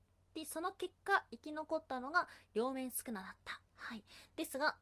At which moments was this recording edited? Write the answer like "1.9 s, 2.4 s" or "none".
3.7 s